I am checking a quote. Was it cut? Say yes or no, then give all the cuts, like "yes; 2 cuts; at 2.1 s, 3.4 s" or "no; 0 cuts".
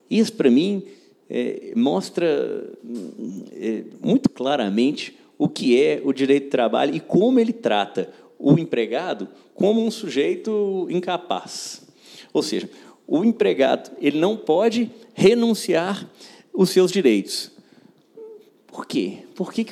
no; 0 cuts